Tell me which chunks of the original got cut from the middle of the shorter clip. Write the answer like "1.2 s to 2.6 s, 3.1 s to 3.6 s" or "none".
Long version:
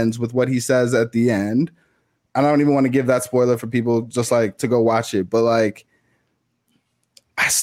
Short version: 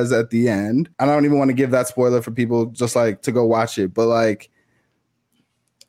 1.8 s to 2.3 s